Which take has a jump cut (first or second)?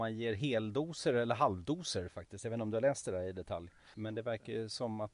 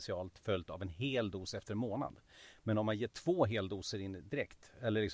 first